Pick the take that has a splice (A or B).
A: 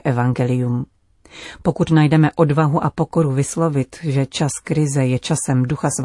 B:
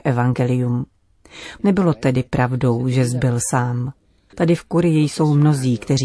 B